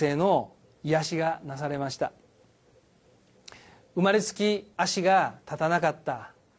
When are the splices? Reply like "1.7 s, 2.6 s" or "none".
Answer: 4.7 s